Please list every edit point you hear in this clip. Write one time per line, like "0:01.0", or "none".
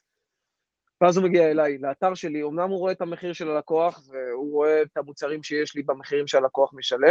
none